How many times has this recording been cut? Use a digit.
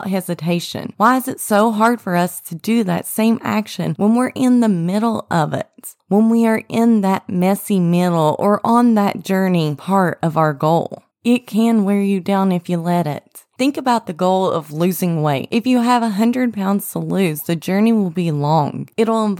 2